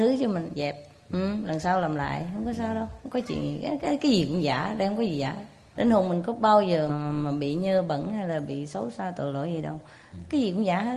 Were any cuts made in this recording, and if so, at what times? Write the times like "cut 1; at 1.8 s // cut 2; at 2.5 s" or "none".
cut 1; at 5.8 s // cut 2; at 6.9 s